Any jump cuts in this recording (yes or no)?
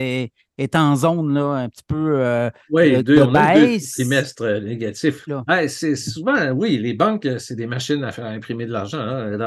yes